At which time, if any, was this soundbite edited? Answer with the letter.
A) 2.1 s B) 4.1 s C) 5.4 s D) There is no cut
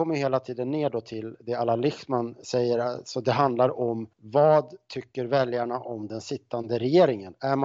B